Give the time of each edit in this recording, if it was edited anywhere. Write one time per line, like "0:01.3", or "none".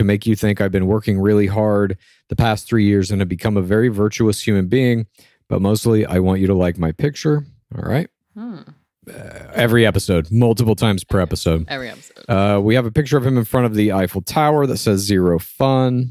0:08.9

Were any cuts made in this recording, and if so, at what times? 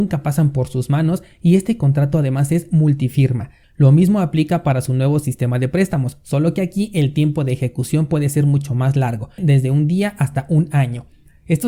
0:03.6
0:09.4

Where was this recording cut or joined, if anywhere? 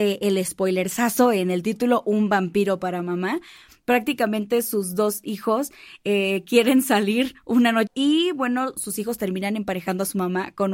0:07.9

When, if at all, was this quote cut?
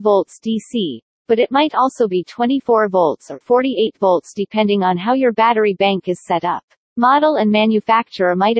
0:03.4
0:06.9

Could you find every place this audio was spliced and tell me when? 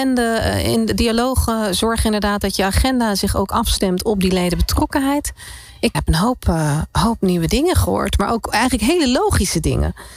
0:05.9

